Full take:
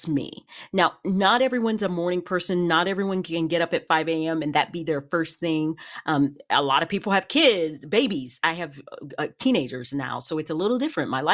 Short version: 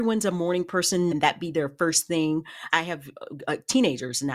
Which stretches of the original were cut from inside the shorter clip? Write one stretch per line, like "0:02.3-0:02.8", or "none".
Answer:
0:02.7-0:04.4
0:06.0-0:08.4